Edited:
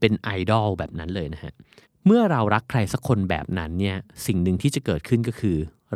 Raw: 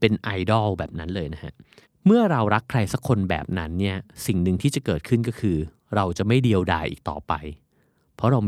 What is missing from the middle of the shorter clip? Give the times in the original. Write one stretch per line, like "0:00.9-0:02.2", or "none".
none